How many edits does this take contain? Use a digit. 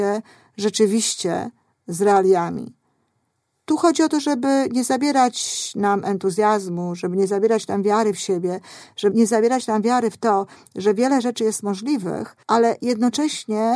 2